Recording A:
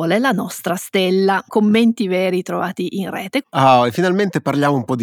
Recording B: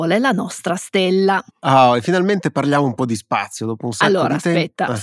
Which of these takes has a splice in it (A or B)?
A